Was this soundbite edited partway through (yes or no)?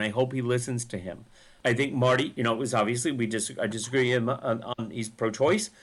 no